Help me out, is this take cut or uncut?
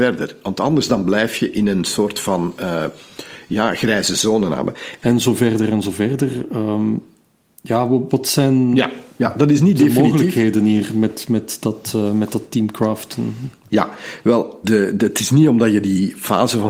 cut